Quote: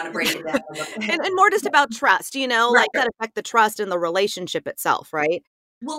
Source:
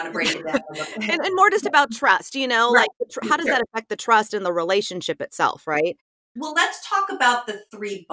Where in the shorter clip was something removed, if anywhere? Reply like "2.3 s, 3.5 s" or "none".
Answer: 2.9 s